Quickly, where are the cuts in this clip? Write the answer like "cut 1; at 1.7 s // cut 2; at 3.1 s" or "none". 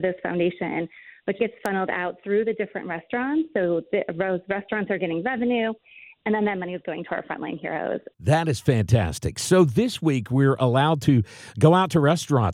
cut 1; at 1.4 s // cut 2; at 8.1 s

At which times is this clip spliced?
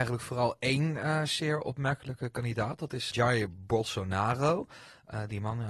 cut 1; at 3.1 s

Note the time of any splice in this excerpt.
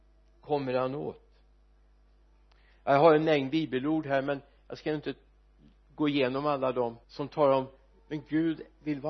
cut 1; at 7.0 s

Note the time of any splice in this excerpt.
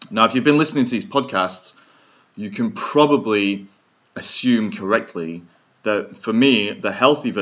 none

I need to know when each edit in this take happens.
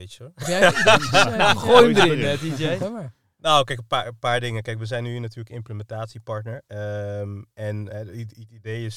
none

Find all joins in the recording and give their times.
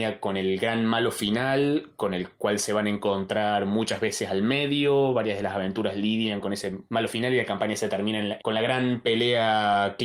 cut 1; at 6.9 s // cut 2; at 8.4 s

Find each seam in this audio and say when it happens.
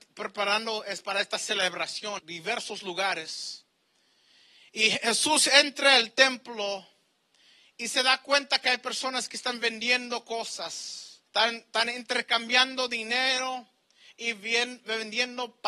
cut 1; at 2.2 s // cut 2; at 11.3 s

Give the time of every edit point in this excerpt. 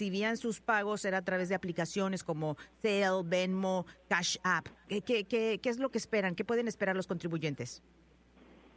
cut 1; at 4.9 s

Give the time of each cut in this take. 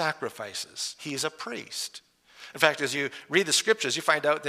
cut 1; at 1.0 s

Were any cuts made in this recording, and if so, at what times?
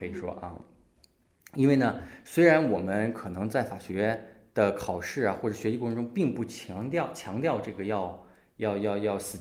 none

